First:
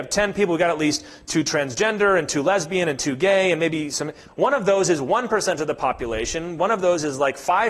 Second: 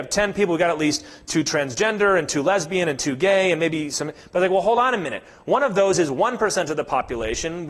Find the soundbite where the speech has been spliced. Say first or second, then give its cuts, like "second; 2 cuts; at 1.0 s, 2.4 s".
first; 1 cut; at 4.3 s